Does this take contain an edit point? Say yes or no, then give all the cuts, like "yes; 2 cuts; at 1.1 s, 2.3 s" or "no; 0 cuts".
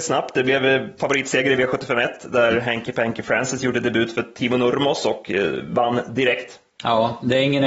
no; 0 cuts